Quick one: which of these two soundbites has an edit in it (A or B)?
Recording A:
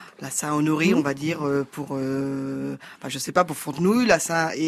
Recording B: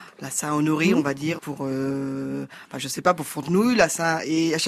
B